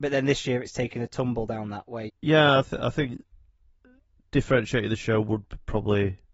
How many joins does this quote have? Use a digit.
1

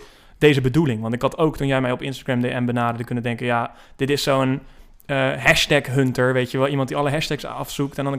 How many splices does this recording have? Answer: 0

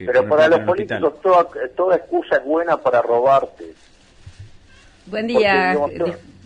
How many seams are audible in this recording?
0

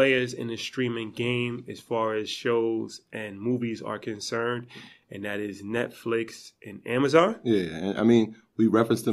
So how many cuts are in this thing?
0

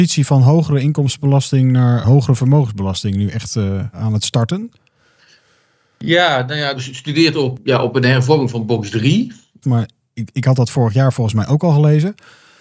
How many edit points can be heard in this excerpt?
2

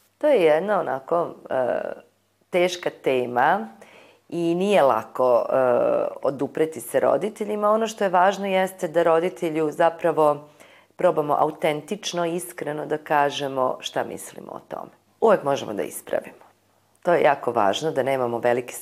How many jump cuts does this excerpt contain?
1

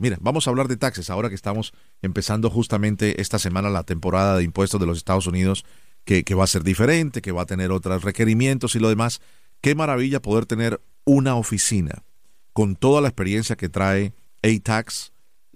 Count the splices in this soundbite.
0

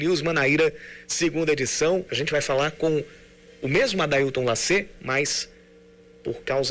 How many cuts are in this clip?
1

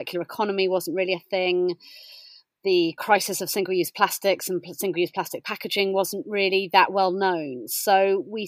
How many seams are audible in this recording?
0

